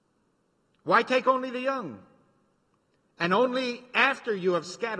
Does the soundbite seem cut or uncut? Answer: uncut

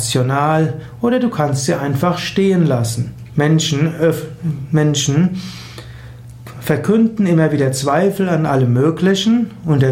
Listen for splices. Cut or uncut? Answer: cut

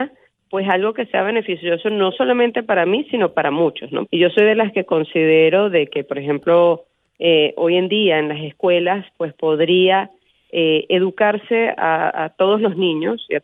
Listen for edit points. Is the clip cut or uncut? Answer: cut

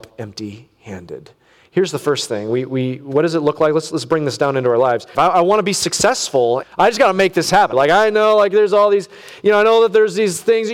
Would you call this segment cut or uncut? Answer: cut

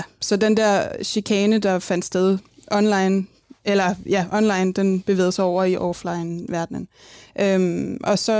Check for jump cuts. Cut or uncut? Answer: uncut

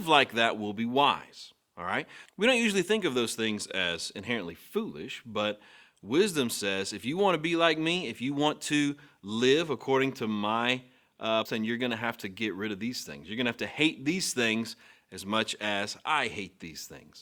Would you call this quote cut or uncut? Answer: cut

